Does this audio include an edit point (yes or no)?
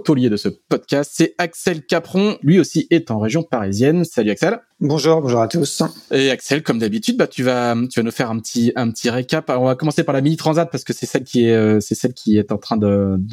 no